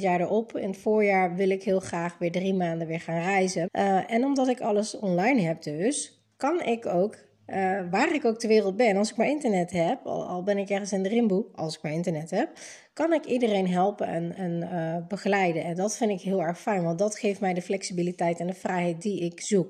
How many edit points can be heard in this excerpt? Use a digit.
1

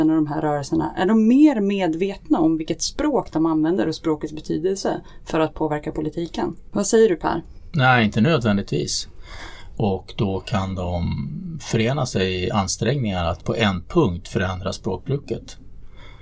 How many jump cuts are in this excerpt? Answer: 2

